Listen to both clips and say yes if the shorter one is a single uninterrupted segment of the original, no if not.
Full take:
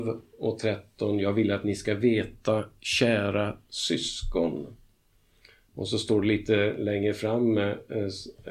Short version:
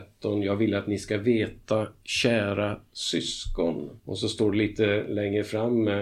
no